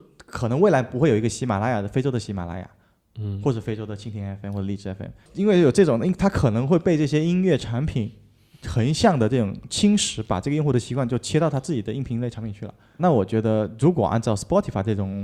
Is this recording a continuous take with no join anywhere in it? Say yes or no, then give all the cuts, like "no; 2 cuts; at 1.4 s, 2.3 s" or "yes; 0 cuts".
no; 1 cut; at 13.0 s